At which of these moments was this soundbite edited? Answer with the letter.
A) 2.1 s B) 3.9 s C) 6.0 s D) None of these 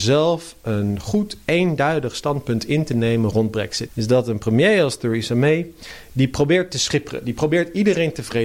B